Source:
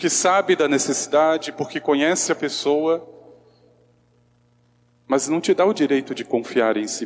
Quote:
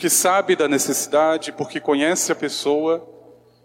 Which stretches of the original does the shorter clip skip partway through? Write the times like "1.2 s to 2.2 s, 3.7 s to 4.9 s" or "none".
none